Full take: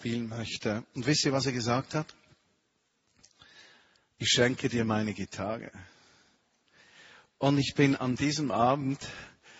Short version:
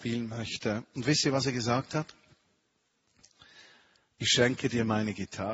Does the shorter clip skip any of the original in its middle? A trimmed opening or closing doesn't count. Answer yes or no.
no